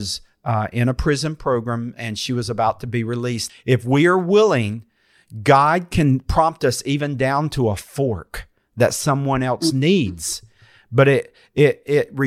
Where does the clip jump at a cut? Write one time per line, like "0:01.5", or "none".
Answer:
0:03.5